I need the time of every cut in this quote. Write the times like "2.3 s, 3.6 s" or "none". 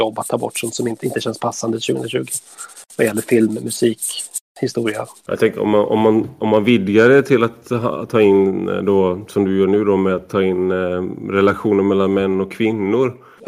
none